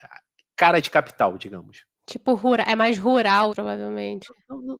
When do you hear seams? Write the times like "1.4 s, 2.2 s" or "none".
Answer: 3.5 s

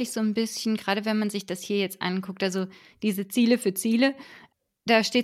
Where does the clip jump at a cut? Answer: none

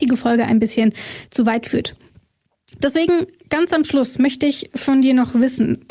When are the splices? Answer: none

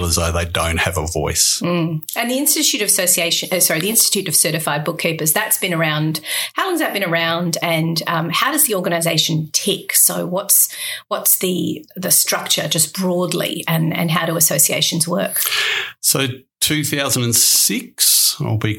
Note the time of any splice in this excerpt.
none

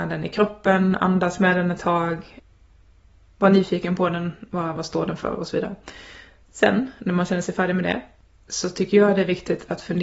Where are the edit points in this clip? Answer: 4.7 s

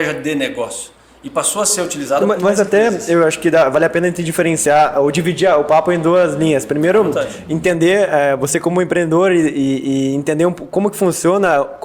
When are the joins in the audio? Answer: 2.4 s

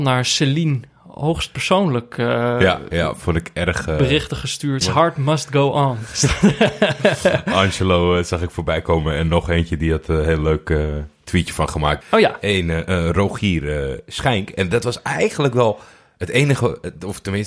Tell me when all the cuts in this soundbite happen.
4.8 s, 12.0 s

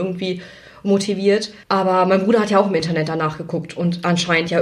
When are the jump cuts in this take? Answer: 1.6 s

